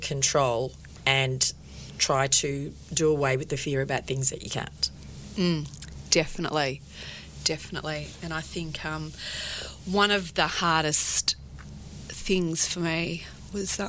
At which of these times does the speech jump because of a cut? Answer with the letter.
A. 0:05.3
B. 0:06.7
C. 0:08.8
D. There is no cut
D